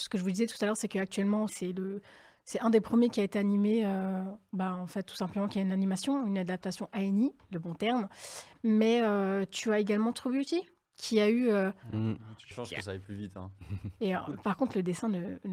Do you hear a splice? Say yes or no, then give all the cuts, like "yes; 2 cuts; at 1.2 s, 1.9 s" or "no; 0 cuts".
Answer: yes; 3 cuts; at 1.5 s, 12.5 s, 14.0 s